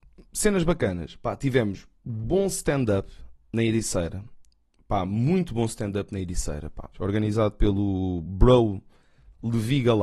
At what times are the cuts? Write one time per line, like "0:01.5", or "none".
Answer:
0:06.9